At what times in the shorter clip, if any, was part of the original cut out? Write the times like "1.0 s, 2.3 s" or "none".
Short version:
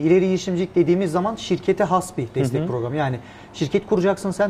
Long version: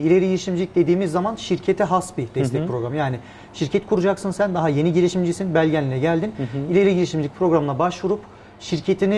none